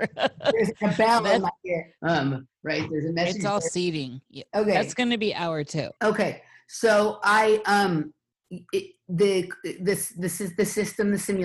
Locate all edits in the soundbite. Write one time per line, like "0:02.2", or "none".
0:02.0
0:04.5
0:06.0